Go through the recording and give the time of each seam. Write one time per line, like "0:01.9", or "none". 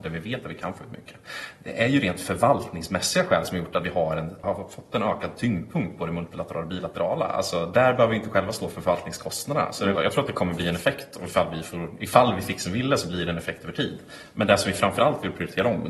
0:04.4
0:10.0